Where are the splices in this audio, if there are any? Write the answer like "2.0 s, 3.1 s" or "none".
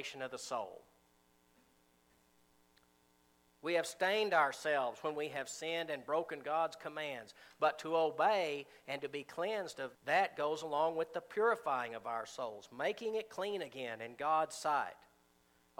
9.9 s